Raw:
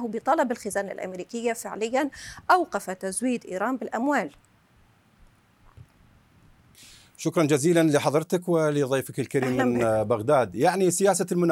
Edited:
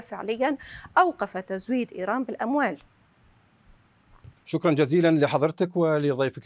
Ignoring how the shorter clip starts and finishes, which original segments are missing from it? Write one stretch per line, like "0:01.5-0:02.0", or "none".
0:05.9-0:07.1